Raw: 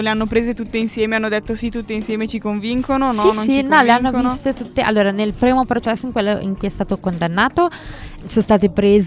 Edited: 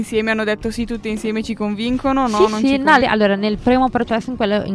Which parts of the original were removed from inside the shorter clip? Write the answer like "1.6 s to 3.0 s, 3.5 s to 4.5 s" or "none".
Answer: 3.8 s to 4.7 s

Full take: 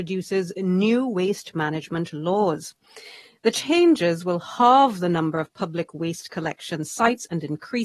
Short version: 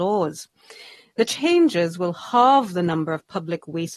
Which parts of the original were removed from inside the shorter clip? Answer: none

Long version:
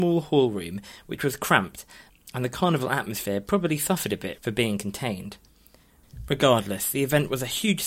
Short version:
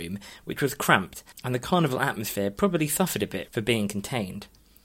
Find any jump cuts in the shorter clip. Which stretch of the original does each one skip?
1.9 s to 2.2 s

